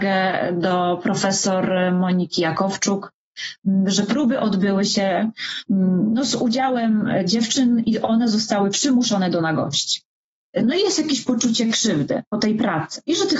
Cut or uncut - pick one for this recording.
cut